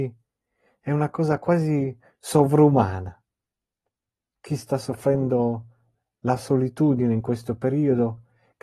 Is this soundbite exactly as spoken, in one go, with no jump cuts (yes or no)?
yes